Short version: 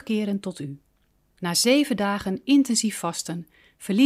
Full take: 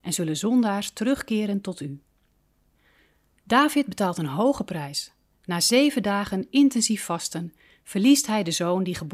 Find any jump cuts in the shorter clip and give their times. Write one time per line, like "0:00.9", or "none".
0:01.3

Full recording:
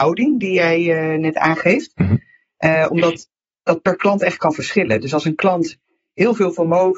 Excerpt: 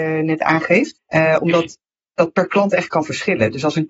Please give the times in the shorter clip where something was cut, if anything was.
0:01.0

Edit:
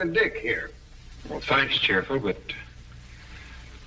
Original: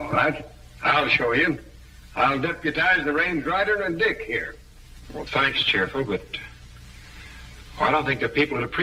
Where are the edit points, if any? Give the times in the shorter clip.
none

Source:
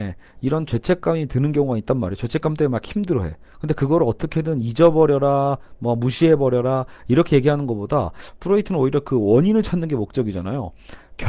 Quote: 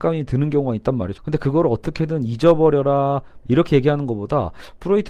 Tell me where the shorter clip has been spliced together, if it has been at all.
0:01.1
0:03.4

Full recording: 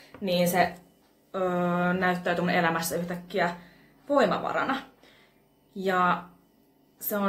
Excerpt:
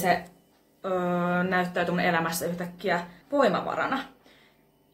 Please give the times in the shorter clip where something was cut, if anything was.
0:03.2

